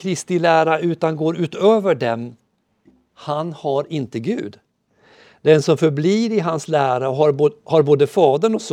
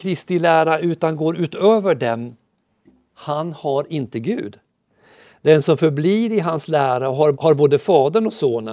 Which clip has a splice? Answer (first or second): second